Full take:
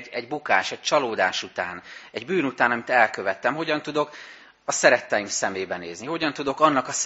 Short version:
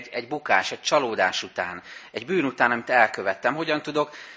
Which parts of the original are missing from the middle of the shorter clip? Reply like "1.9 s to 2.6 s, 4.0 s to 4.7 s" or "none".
none